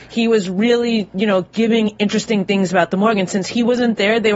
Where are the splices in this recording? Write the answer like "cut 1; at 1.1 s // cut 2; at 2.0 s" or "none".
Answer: none